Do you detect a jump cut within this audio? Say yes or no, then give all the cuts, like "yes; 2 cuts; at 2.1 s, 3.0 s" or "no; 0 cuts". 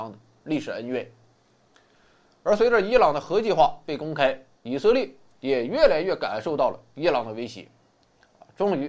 yes; 1 cut; at 4.5 s